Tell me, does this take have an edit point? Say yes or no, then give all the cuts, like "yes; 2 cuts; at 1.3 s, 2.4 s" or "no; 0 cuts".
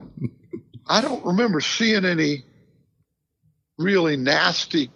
no; 0 cuts